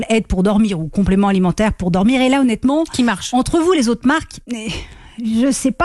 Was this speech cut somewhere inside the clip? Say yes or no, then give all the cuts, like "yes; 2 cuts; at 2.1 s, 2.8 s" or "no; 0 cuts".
yes; 1 cut; at 4.4 s